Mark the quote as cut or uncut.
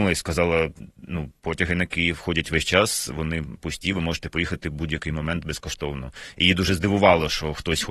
uncut